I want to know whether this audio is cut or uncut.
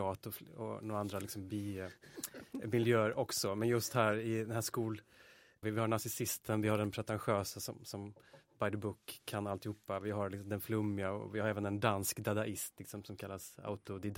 cut